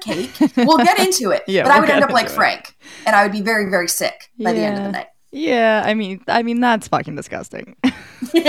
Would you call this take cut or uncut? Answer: uncut